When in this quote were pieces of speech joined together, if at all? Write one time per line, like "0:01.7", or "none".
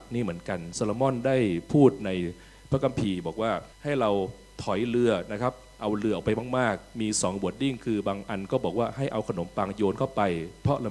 0:03.7